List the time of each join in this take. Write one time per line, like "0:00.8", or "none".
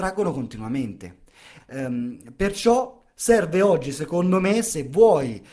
0:01.6